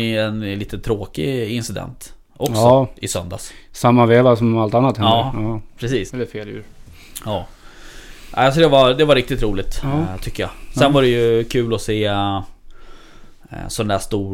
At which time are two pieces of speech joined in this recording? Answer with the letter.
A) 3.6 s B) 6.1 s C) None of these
B